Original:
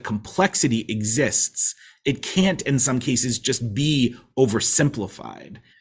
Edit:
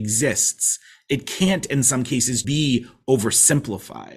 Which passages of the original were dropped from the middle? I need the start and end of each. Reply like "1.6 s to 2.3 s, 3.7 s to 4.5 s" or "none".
3.4 s to 3.7 s